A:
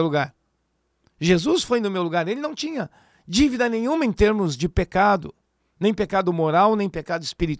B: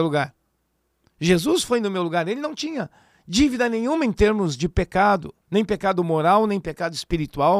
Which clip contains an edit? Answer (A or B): B